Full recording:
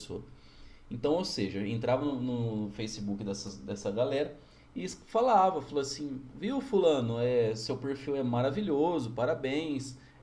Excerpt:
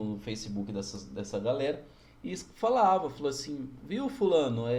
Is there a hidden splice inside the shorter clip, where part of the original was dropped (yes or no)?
no